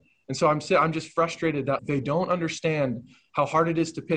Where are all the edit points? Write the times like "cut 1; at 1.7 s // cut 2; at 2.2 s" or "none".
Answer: cut 1; at 1.8 s